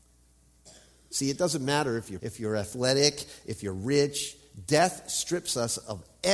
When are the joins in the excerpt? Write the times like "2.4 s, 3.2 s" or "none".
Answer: 2.2 s